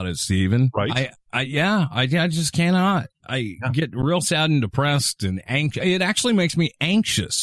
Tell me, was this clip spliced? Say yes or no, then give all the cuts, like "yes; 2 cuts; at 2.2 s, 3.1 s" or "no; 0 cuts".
no; 0 cuts